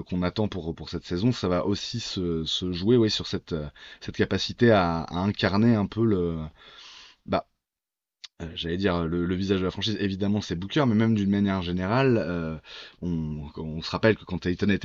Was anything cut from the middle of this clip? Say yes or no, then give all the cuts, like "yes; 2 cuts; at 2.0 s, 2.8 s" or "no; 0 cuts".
no; 0 cuts